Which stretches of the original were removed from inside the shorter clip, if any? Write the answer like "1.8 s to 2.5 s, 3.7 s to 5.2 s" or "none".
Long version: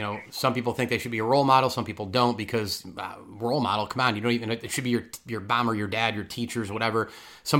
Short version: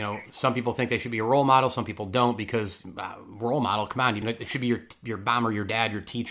4.2 s to 4.4 s